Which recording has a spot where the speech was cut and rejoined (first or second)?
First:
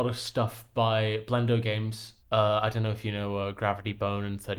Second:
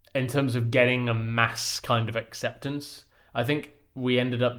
first